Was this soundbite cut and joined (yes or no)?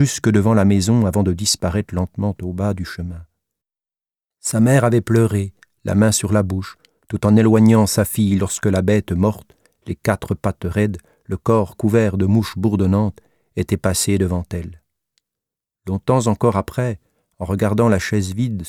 no